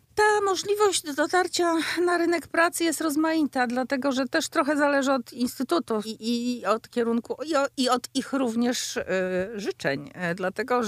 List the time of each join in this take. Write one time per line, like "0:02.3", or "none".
0:06.0